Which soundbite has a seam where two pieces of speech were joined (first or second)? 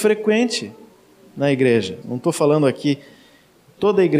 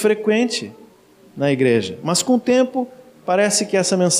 first